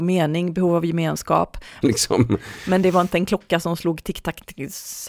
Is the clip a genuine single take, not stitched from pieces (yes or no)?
no